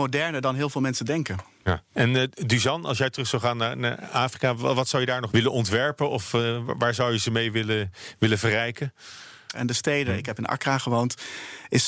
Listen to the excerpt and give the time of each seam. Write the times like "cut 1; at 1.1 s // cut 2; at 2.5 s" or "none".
cut 1; at 5.3 s // cut 2; at 9.5 s